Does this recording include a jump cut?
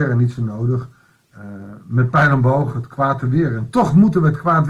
no; 0 cuts

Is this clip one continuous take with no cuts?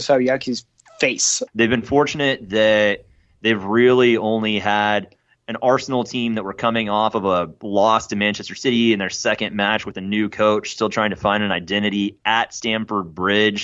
no; 1 cut; at 1.5 s

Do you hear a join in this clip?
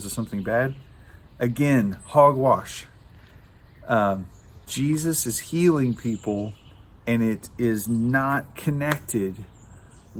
no; 0 cuts

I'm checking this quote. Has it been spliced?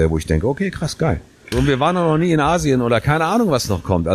yes; 1 cut; at 1.5 s

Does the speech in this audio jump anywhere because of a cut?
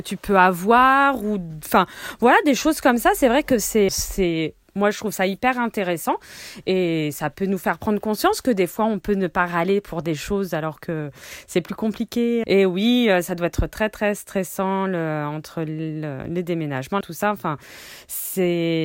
yes; 3 cuts; at 3.9 s, 12.4 s, 17.0 s

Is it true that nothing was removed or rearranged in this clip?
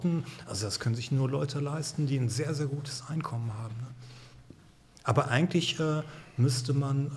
yes; 0 cuts

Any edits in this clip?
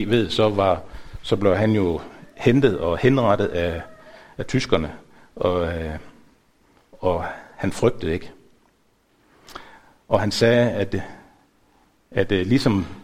no; 0 cuts

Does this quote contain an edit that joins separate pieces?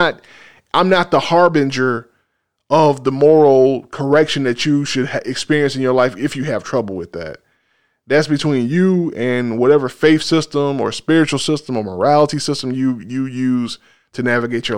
yes; 1 cut; at 13.0 s

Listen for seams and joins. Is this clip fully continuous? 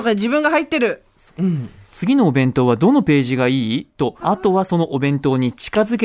no; 2 cuts; at 1.3 s, 4.2 s

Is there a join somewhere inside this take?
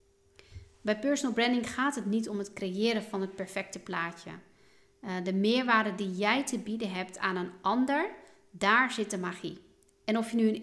no; 0 cuts

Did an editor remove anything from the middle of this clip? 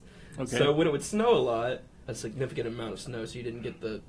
yes; 1 cut; at 2.0 s

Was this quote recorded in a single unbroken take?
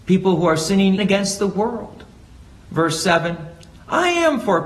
no; 1 cut; at 1.0 s

